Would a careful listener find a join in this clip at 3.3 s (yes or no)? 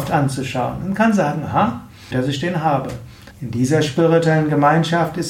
yes